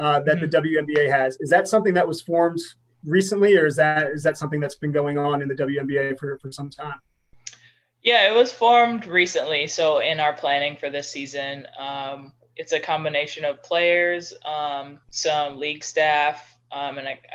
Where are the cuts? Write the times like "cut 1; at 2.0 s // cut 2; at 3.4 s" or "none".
cut 1; at 15.0 s